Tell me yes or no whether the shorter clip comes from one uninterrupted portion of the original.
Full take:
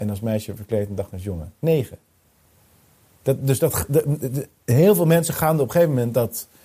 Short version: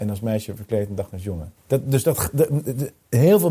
no